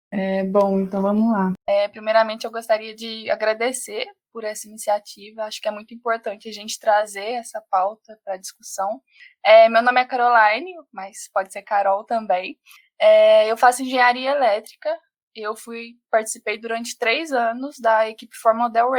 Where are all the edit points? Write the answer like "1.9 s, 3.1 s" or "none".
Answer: 1.6 s